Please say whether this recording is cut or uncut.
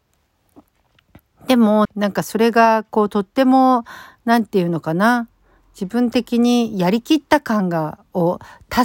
cut